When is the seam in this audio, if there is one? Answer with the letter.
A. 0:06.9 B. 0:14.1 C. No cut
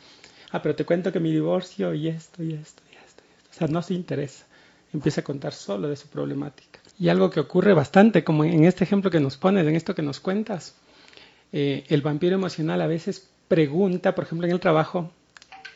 A